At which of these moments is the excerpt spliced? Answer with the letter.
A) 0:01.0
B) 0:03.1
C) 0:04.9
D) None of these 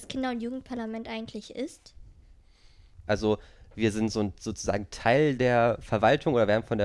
B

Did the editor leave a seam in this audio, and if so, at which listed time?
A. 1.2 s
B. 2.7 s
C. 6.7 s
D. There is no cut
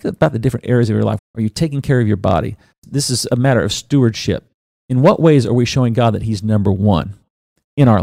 A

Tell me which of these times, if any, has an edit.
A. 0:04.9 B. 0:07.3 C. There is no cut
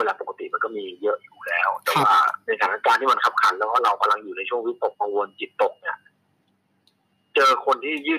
A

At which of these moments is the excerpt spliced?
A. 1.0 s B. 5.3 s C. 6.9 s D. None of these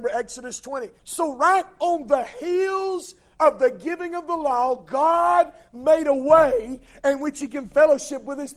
A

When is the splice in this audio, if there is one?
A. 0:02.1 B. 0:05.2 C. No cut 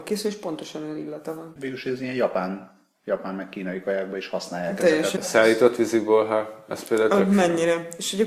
B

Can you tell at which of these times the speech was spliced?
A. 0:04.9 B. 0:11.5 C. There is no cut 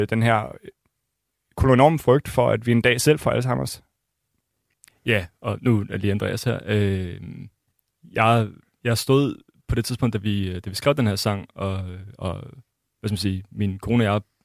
A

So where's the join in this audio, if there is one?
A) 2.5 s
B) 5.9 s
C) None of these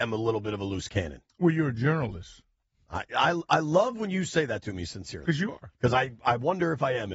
C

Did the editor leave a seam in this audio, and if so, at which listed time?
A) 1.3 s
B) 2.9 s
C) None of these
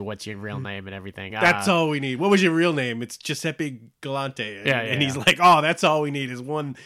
A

